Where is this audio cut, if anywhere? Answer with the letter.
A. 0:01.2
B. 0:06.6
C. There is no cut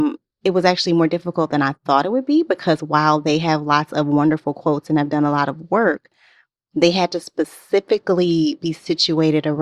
C